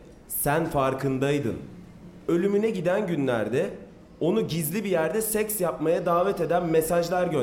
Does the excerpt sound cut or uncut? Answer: uncut